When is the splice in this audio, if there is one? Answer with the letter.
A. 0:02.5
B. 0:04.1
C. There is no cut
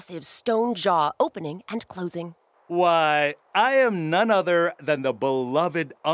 A